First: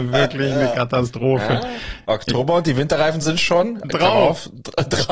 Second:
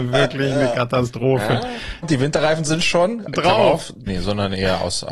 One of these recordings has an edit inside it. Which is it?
second; 2 cuts; at 2.0 s, 4.1 s

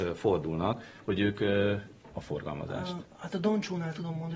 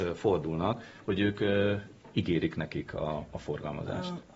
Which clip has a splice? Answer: first; 1 cut; at 2.1 s

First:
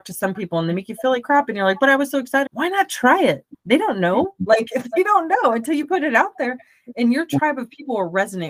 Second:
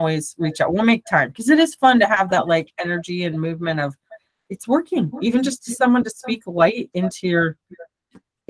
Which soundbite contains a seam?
first; 1 cut; at 2.5 s

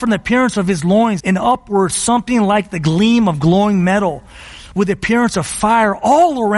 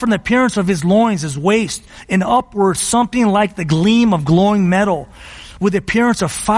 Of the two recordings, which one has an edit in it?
first; 1 cut; at 1.2 s

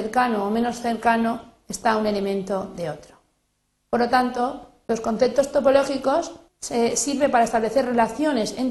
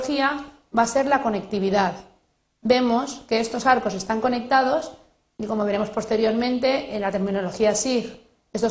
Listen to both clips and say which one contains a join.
first; 1 cut; at 6.5 s

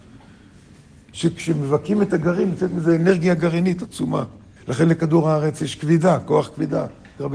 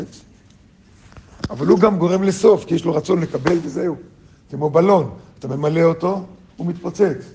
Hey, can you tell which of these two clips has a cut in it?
first; 1 cut; at 4.6 s

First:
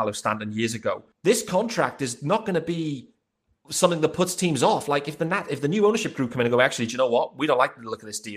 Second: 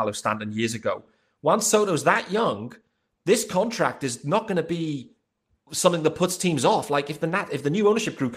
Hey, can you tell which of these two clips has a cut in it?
first; 1 cut; at 1.1 s

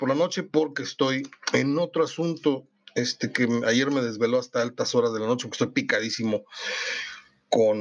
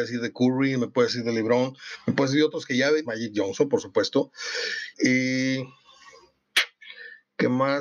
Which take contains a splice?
second; 2 cuts; at 3.0 s, 4.9 s

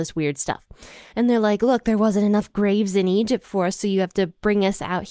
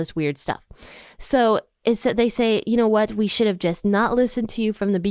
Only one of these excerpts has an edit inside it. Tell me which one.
first; 1 cut; at 1.1 s

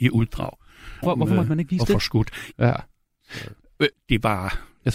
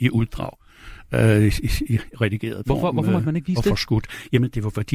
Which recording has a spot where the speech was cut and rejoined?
first; 3 cuts; at 1.0 s, 2.5 s, 3.9 s

